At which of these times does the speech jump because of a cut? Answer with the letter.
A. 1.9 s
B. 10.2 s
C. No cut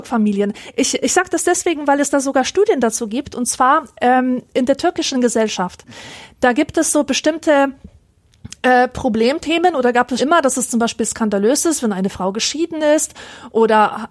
B